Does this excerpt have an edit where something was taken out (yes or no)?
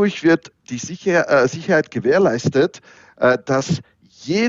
no